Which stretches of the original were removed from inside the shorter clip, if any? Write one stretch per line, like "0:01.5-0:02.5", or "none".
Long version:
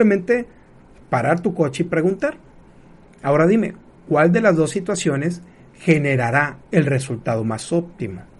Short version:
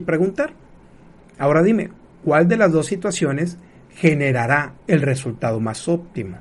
none